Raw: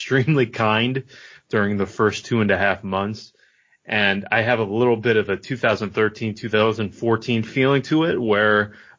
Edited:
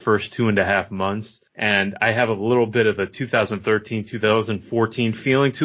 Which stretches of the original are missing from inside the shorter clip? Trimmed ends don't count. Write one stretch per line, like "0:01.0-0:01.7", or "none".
0:03.4-0:03.8